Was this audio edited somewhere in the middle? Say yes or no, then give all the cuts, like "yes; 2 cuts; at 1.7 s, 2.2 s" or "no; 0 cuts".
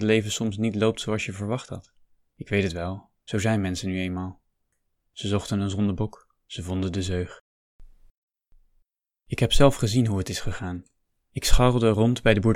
no; 0 cuts